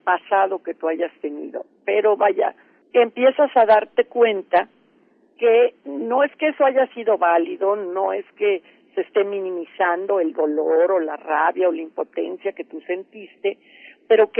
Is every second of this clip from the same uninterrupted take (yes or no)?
no